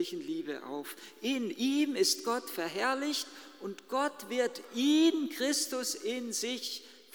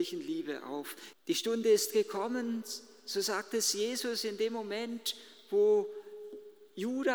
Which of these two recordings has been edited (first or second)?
second